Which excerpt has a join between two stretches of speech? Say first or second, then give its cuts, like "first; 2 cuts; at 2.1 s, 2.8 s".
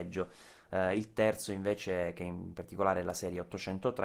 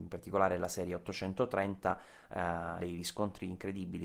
second; 1 cut; at 2.8 s